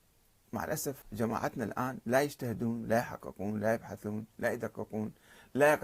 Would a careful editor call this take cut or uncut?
cut